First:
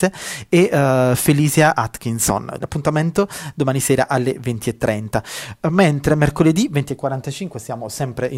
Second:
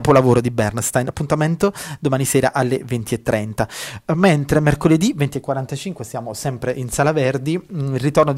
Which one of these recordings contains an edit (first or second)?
first